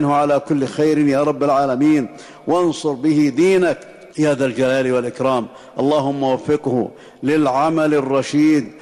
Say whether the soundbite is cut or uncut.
cut